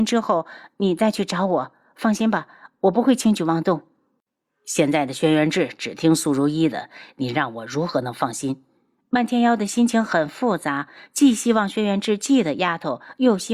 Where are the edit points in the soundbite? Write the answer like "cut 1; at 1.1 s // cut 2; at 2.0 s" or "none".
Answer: none